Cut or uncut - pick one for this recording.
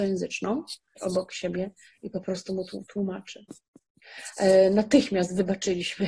cut